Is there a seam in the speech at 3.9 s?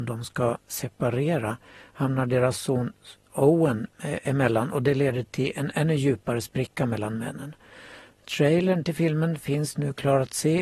yes; 1 cut; at 3.9 s

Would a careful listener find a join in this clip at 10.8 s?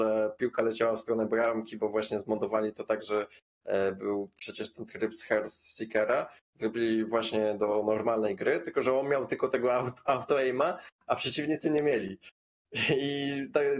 no; 0 cuts

